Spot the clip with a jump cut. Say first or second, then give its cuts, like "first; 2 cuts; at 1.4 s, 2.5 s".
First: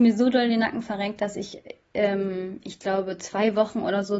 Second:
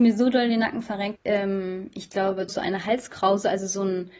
second; 2 cuts; at 1.2 s, 2.5 s